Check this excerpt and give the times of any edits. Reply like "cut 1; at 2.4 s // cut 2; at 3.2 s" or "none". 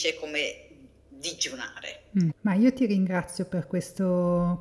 cut 1; at 2.3 s